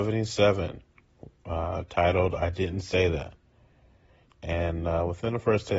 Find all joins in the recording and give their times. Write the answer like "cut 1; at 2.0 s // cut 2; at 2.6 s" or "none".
cut 1; at 4.3 s

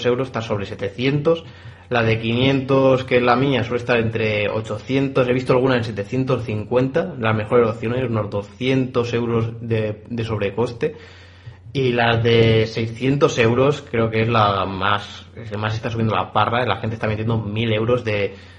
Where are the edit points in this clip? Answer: none

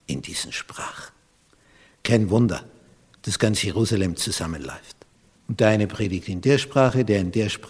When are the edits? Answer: cut 1; at 5.4 s

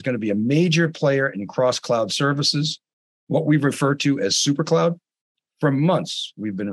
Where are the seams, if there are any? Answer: none

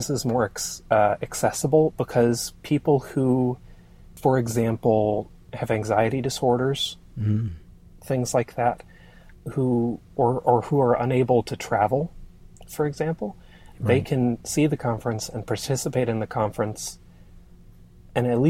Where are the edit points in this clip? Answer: cut 1; at 9.3 s

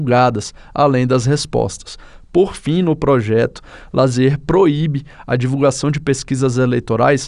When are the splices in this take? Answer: none

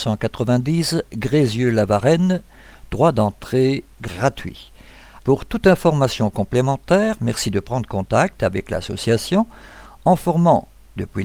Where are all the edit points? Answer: cut 1; at 5.2 s

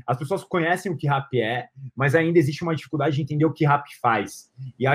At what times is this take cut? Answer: none

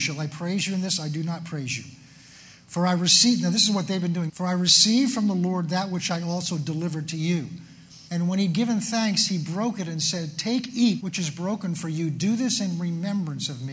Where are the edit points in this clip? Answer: cut 1; at 4.3 s // cut 2; at 8.1 s // cut 3; at 11.0 s

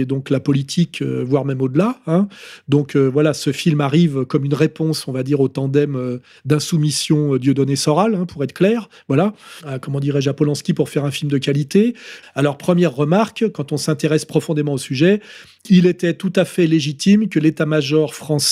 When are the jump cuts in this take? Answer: cut 1; at 9.6 s // cut 2; at 12.2 s

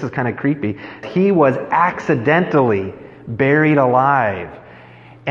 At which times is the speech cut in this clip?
cut 1; at 1.0 s

